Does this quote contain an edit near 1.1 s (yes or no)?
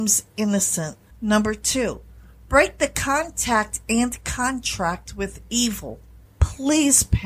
yes